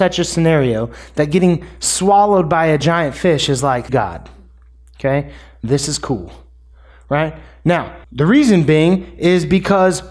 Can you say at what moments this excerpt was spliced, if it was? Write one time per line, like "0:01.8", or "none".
0:03.9
0:08.0